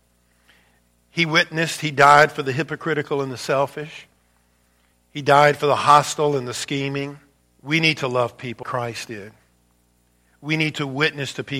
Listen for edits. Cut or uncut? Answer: cut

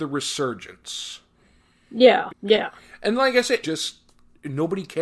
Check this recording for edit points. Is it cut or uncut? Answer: cut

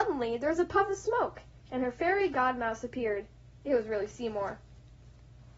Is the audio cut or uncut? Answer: uncut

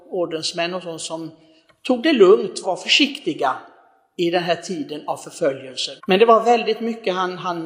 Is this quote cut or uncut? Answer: cut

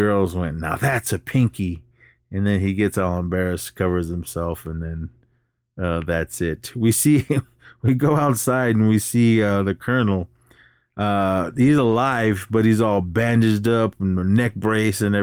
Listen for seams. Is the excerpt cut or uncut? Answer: uncut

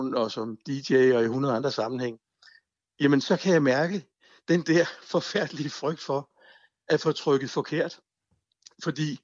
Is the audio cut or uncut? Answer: uncut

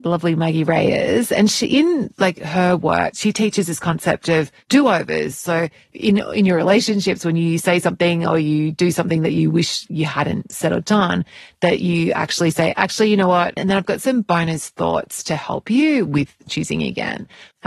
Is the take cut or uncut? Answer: cut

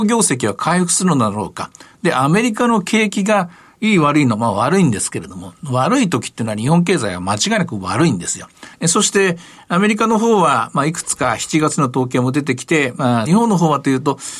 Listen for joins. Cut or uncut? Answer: cut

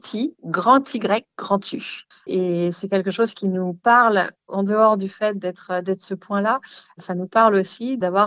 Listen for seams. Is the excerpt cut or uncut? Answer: cut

